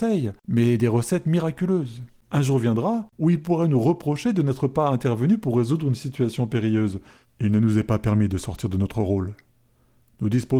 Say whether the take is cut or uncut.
uncut